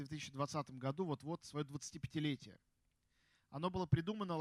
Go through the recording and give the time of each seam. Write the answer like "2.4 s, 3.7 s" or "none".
none